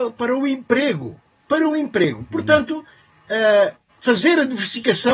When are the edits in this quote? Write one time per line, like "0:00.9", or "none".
none

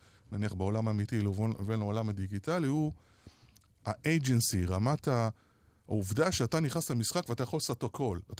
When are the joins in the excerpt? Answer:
none

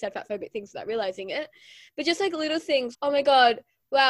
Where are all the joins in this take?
0:02.9

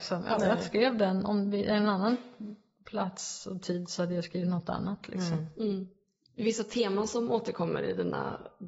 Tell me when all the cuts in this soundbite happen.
none

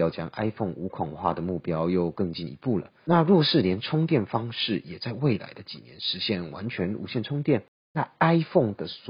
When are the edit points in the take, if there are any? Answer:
none

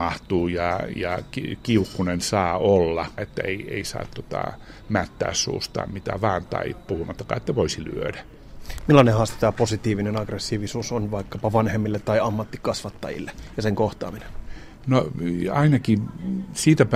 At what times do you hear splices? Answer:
0:03.2

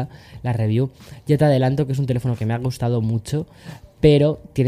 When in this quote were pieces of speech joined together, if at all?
none

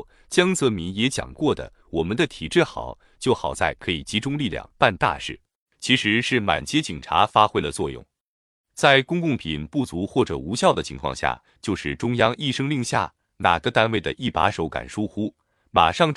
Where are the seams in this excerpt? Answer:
0:05.6

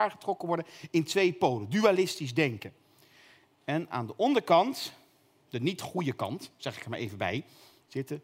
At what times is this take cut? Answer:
none

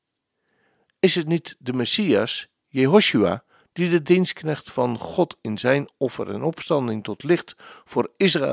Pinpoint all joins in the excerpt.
none

